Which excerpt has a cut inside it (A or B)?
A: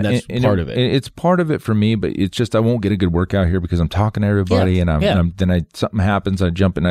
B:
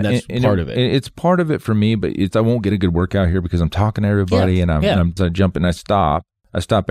B